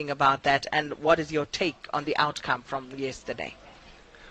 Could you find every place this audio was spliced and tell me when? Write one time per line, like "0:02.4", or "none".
none